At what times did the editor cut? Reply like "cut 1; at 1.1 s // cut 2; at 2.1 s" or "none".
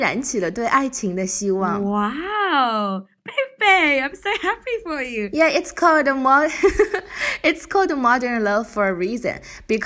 none